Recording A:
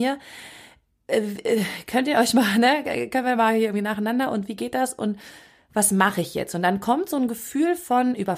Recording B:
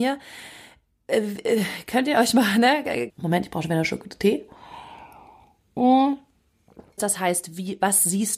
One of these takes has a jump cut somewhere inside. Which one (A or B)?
B